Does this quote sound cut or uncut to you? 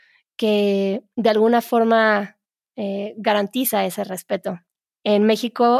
uncut